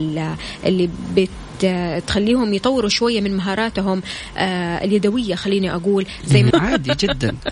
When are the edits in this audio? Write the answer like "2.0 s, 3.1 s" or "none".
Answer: 6.5 s